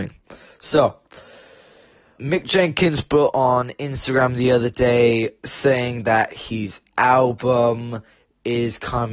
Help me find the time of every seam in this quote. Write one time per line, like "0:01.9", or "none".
0:02.2